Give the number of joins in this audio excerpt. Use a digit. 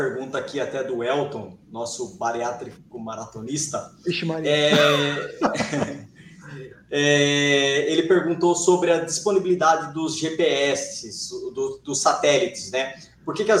0